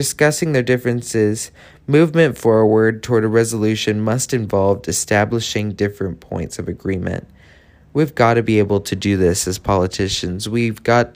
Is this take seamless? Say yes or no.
yes